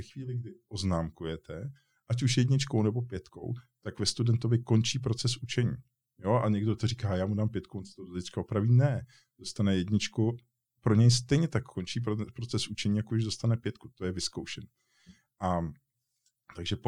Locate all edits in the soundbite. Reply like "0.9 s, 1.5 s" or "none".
none